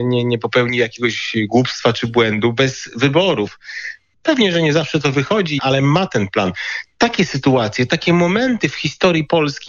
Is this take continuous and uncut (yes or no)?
no